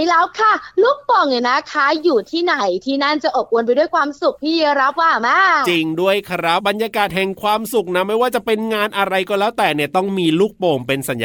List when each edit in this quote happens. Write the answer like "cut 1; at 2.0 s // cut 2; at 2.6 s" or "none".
cut 1; at 6.6 s